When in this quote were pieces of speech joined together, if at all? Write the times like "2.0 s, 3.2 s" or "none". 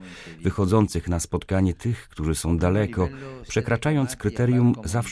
none

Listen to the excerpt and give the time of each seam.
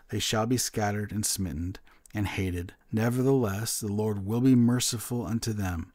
2.8 s

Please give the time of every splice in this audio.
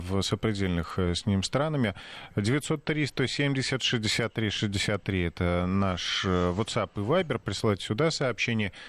none

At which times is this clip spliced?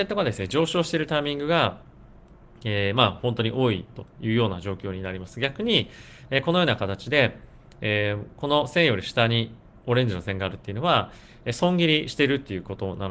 none

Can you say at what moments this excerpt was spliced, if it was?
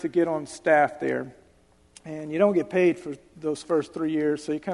none

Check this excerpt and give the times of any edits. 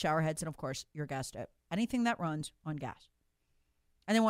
none

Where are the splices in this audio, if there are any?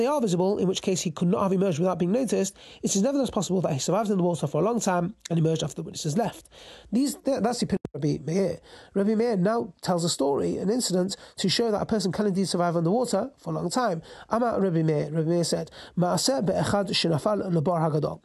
none

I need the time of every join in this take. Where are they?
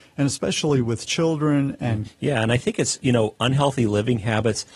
2.0 s

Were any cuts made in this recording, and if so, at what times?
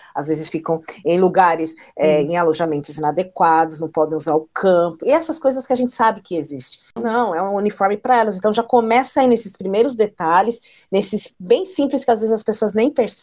5.0 s, 7.0 s, 11.3 s

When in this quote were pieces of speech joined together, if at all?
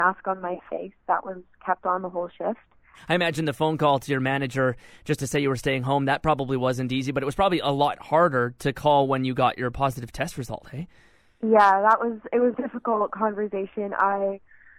12.5 s

